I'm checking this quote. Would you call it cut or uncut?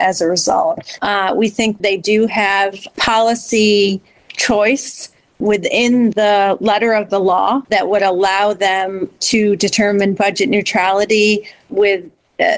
cut